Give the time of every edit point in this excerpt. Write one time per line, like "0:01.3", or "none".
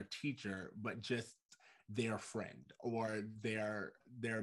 none